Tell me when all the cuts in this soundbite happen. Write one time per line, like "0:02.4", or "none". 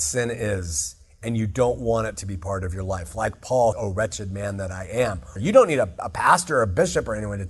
0:03.7
0:05.4